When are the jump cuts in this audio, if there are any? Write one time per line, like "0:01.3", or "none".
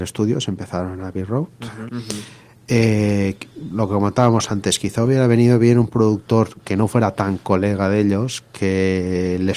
0:01.9